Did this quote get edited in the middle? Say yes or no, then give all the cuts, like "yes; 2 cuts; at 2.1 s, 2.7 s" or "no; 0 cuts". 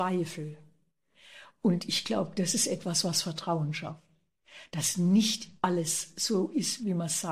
no; 0 cuts